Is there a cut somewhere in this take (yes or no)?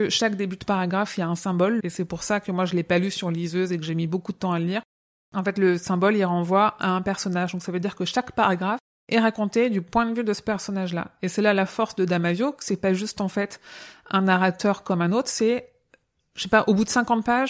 yes